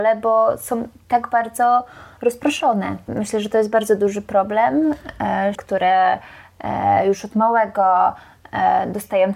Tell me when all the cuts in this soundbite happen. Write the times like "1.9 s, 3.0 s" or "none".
3.1 s, 5.5 s